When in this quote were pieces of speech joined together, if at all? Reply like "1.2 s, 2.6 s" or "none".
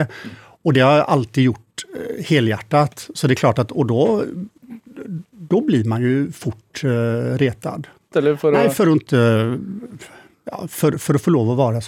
8.1 s